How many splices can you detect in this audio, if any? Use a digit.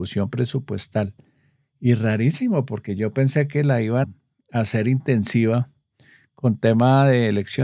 1